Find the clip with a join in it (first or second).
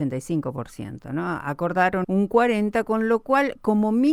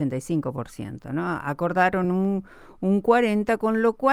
first